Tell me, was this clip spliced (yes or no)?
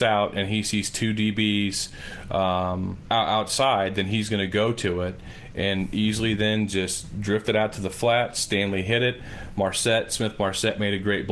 yes